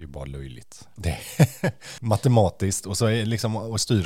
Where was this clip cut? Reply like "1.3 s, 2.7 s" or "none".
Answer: 1.0 s, 2.0 s